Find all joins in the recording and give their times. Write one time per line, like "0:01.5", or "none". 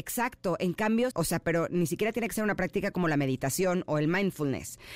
0:01.1